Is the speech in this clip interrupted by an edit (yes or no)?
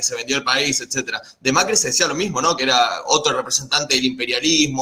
no